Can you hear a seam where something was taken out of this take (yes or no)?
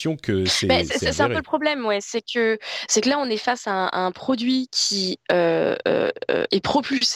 no